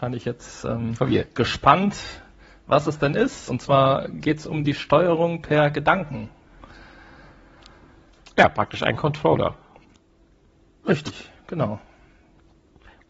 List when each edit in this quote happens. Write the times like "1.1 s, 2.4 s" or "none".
none